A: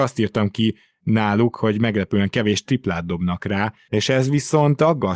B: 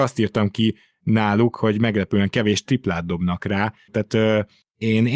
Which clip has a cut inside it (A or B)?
B